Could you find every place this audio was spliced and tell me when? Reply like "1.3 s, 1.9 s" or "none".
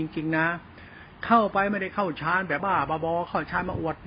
2.6 s